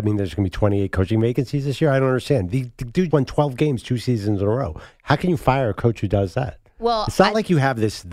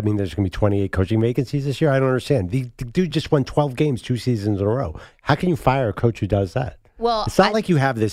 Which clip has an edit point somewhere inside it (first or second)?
first